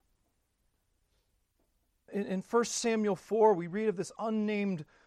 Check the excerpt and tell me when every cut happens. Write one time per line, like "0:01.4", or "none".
0:02.1